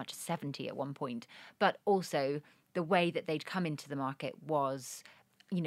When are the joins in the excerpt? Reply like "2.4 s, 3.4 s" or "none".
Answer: none